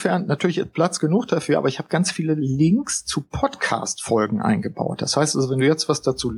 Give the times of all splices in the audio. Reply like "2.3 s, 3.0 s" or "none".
none

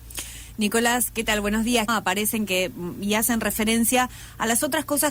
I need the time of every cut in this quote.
1.9 s

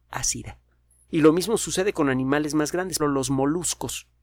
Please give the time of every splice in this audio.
1.1 s, 3.0 s

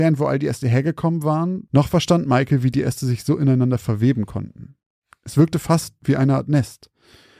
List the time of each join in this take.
1.7 s

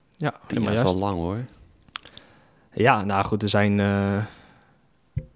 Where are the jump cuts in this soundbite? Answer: none

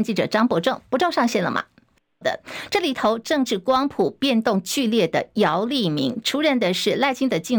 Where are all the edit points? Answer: 2.2 s, 6.2 s

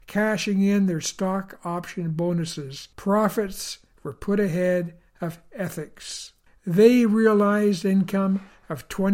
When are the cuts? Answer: 2.9 s, 6.5 s

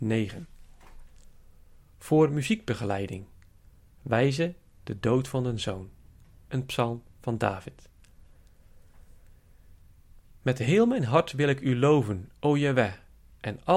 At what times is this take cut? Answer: none

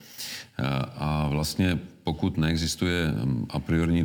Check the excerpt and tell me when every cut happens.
none

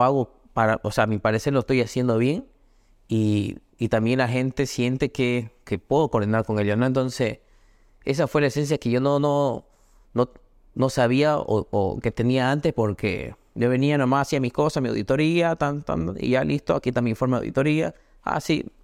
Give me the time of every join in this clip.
none

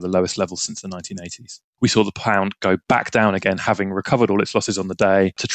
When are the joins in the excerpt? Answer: 1.8 s

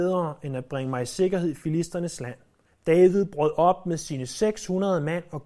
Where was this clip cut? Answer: 2.6 s

